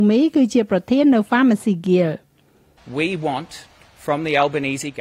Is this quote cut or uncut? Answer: uncut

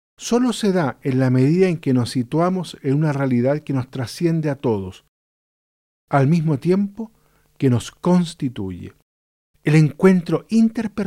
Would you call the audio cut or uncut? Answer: cut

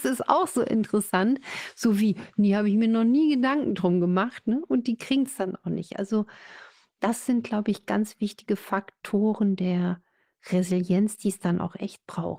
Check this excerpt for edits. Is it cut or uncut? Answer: uncut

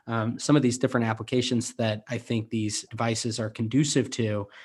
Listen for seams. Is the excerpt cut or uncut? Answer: cut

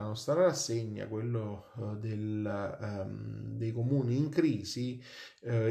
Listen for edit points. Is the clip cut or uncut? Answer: uncut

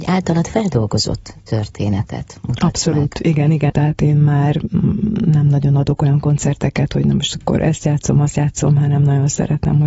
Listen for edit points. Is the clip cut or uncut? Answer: cut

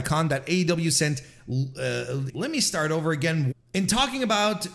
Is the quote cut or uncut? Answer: cut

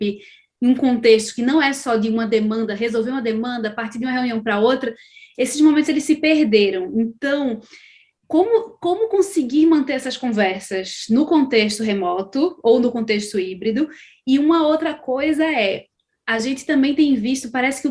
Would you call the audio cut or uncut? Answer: uncut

